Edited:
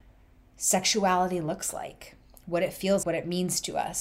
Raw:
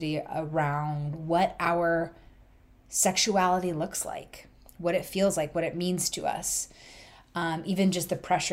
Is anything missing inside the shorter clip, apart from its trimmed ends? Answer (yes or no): yes